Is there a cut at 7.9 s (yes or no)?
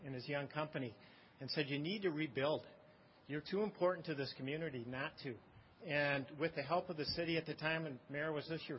no